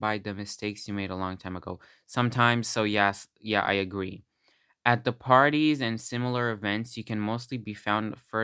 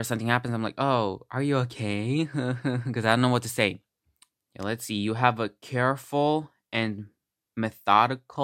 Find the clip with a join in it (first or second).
second